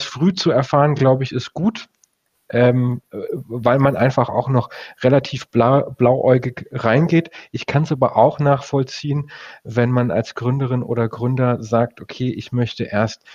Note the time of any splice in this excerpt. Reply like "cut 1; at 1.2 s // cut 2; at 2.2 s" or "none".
none